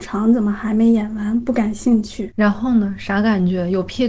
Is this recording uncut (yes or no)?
yes